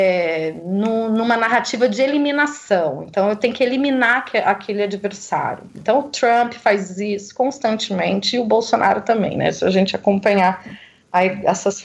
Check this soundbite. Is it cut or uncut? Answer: uncut